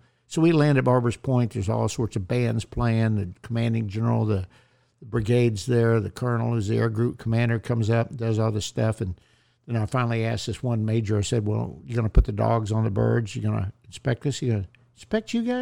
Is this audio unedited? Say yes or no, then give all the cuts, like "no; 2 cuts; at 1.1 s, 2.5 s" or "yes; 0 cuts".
yes; 0 cuts